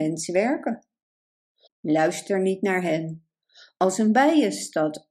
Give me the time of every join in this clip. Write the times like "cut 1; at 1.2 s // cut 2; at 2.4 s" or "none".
cut 1; at 1.7 s